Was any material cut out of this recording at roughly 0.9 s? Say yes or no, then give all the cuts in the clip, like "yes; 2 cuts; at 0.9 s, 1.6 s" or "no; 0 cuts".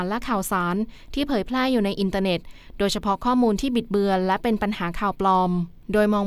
no; 0 cuts